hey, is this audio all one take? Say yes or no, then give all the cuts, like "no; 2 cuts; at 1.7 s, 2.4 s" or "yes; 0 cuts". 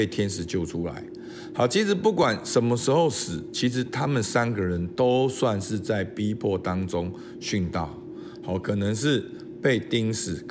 yes; 0 cuts